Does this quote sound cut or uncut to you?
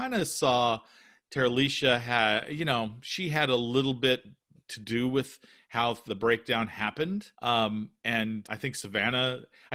cut